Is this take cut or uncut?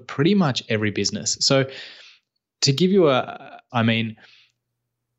cut